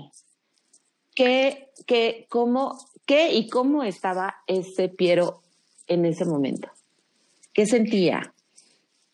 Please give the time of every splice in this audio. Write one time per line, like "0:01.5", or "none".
none